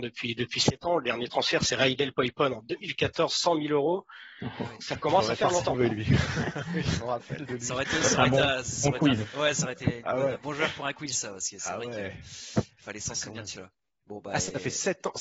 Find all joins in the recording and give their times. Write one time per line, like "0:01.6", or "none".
none